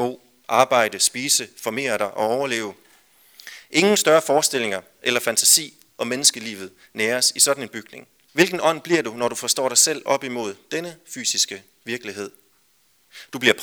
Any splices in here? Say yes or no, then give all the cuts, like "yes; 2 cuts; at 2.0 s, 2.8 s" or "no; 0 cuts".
yes; 1 cut; at 8.3 s